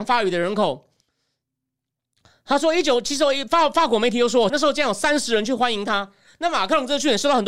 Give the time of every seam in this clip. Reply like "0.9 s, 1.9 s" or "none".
4.5 s